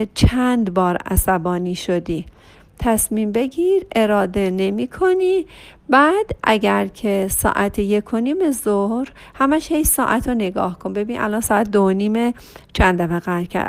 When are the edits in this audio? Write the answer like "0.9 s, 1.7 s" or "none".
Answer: none